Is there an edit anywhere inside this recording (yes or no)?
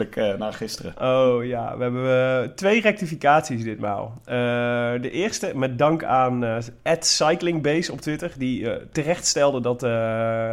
no